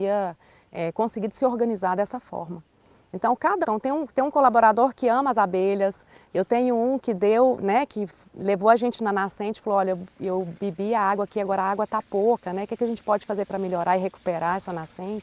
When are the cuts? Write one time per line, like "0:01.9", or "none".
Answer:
0:03.6